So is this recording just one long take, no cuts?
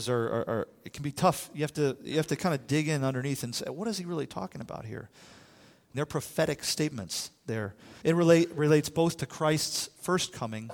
no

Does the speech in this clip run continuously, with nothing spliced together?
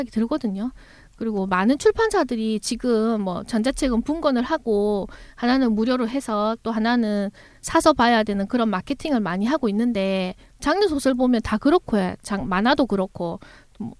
yes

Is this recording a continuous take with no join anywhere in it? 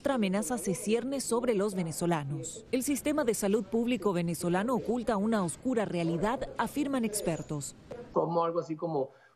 no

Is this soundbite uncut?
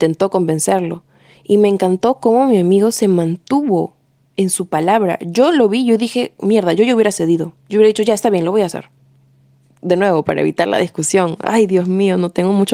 yes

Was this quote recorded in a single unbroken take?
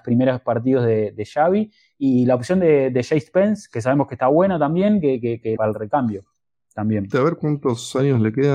no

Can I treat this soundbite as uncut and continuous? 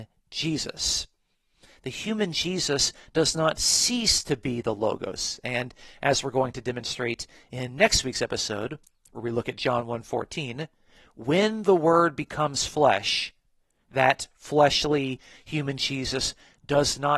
yes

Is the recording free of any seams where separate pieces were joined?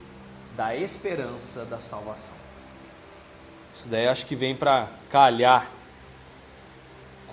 no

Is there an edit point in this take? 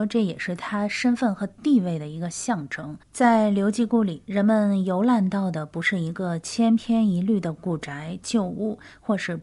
yes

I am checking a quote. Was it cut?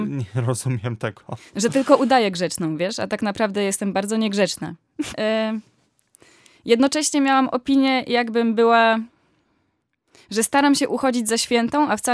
yes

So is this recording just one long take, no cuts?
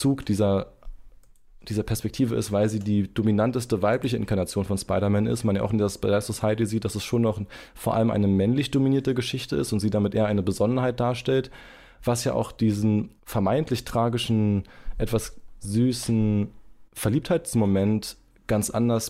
no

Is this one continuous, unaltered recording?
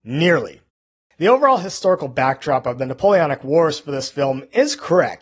yes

